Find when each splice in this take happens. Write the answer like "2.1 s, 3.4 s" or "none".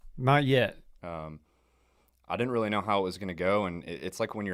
1.0 s